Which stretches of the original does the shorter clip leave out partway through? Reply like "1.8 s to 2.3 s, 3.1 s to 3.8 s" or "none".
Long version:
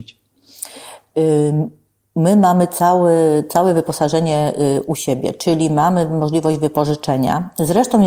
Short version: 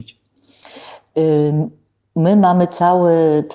none